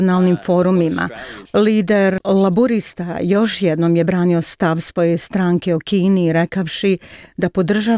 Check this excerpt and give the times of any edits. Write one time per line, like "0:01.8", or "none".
0:01.4